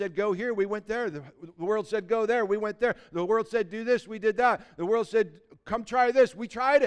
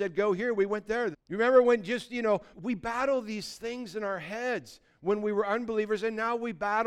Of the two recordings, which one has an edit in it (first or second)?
second